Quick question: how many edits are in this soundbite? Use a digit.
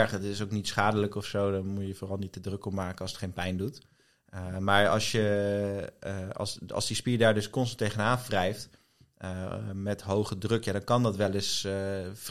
0